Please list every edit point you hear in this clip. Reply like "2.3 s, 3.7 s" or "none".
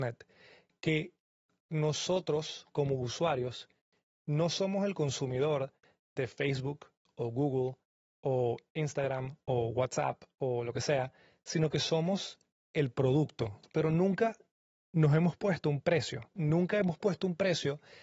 13.6 s